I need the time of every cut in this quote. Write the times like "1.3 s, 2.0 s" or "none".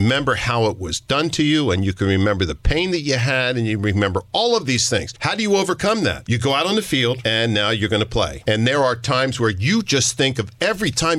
none